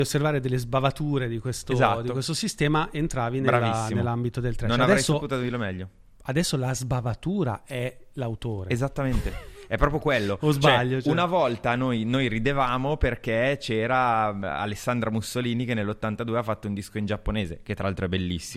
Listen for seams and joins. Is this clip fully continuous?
yes; 0 cuts

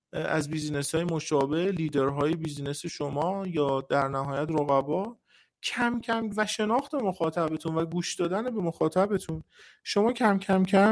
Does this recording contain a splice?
yes; 1 cut; at 6.0 s

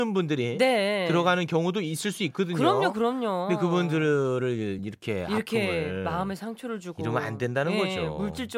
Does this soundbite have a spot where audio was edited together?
no; 0 cuts

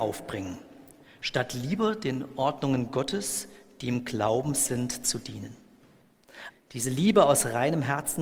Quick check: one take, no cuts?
no; 1 cut; at 6.5 s

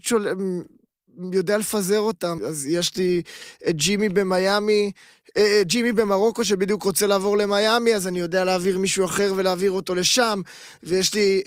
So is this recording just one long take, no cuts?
no; 1 cut; at 2.4 s

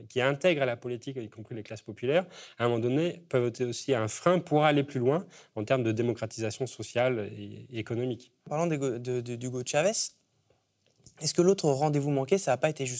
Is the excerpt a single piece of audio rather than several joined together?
yes; 0 cuts

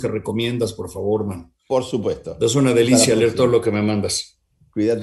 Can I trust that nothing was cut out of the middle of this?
yes; 0 cuts

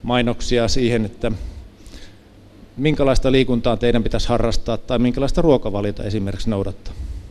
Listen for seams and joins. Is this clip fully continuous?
yes; 0 cuts

